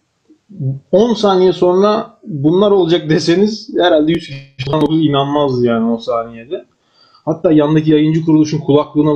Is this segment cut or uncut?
cut